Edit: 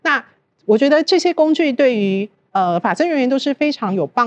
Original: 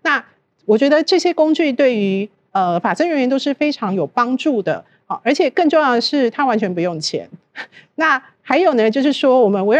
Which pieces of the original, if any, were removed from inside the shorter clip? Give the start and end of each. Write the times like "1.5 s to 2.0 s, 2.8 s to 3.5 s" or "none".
none